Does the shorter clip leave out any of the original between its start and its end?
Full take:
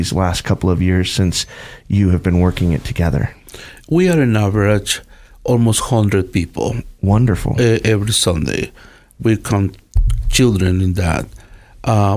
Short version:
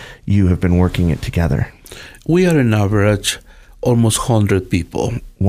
no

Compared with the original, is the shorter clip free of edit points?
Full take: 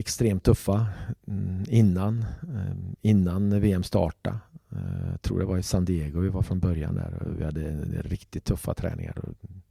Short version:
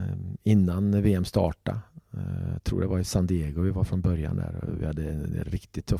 yes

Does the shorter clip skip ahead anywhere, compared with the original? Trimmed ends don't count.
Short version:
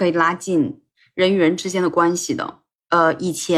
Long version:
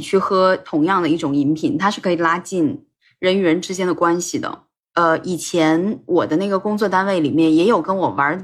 no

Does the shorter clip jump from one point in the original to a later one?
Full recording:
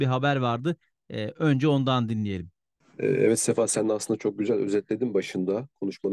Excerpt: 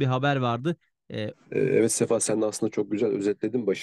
yes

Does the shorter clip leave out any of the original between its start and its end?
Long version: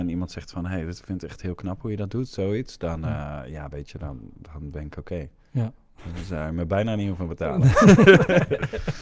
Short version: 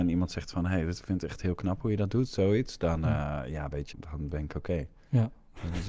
yes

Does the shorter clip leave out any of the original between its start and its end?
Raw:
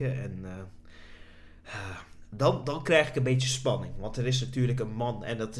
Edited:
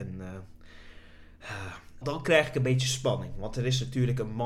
yes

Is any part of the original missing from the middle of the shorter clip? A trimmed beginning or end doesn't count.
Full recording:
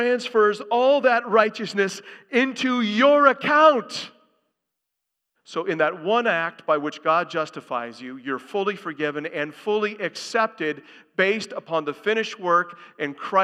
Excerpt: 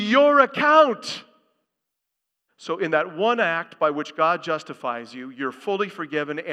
no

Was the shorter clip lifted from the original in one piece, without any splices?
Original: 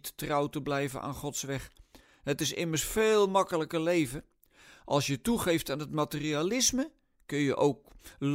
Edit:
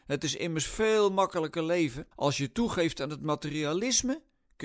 no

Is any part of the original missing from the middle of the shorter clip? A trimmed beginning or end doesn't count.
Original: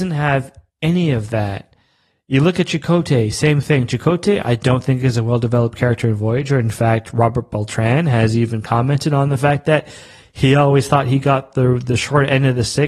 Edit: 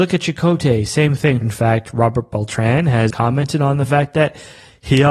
yes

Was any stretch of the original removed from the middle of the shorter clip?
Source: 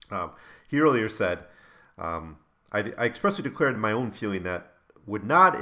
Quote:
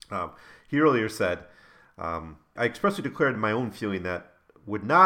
yes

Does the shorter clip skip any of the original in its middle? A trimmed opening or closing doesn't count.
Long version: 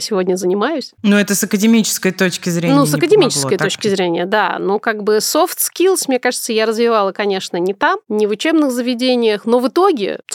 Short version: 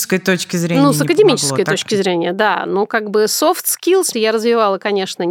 yes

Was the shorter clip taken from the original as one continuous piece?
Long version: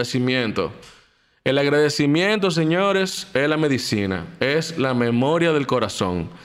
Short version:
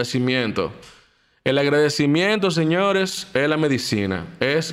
yes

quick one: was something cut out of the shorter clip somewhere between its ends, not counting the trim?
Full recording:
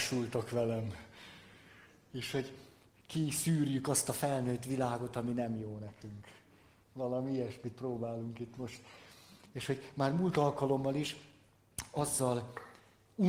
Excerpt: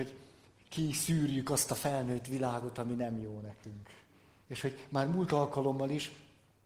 yes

